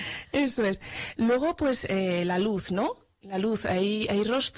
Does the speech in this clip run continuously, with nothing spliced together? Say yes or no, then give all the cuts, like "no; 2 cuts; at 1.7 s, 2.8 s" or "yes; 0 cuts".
yes; 0 cuts